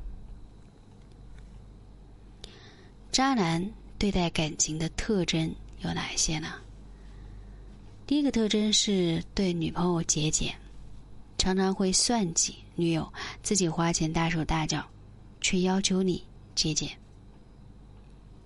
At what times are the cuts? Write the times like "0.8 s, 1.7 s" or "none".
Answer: none